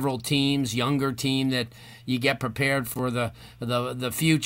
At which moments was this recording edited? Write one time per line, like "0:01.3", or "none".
none